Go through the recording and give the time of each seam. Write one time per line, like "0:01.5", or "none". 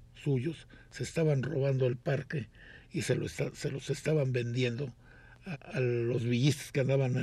0:05.5